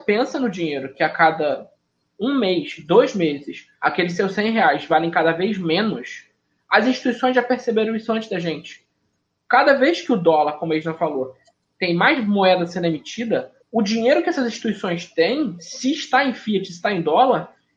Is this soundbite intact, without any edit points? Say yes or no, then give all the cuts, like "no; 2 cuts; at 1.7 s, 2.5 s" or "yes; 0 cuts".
no; 1 cut; at 13.6 s